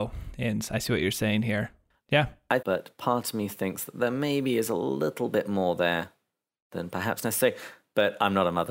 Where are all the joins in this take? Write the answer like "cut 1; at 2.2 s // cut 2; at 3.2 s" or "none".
cut 1; at 2.6 s